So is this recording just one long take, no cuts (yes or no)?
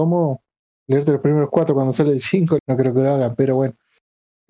no